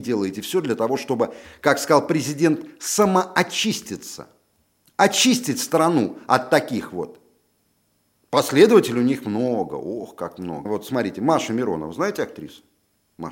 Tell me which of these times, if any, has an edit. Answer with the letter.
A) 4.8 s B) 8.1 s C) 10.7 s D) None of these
C